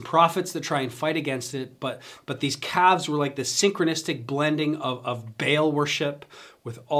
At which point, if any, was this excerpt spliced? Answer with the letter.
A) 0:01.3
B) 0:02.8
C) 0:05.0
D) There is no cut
D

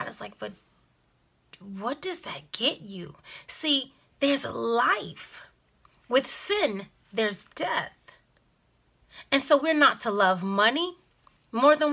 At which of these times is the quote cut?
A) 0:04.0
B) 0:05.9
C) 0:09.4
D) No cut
A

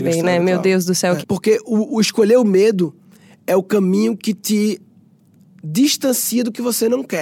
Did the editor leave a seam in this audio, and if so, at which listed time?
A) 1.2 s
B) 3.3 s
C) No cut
A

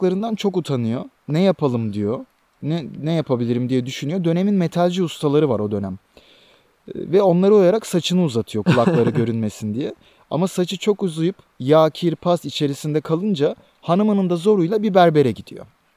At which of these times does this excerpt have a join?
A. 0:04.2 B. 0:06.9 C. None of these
C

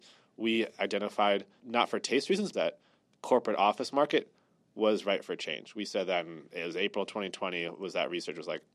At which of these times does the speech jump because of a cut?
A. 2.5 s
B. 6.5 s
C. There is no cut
A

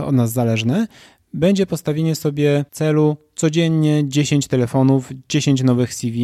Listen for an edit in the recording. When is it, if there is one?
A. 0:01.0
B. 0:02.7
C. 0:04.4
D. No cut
B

